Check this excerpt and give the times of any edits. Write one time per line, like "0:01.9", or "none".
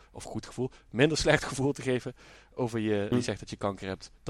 0:03.1